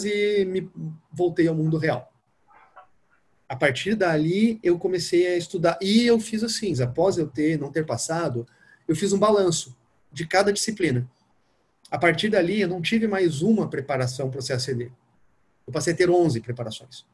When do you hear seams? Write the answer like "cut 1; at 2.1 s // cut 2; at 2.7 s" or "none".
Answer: cut 1; at 6.7 s